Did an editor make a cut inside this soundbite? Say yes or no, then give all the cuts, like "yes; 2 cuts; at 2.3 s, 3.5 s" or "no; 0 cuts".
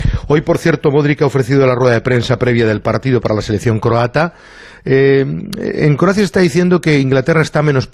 no; 0 cuts